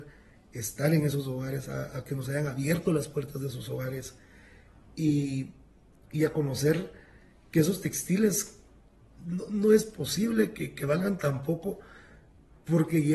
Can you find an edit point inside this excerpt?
no; 0 cuts

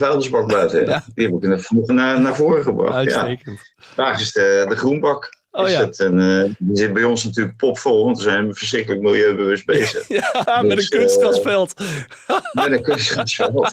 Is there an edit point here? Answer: yes; 2 cuts; at 1.9 s, 10.4 s

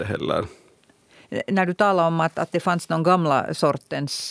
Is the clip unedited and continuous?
yes; 0 cuts

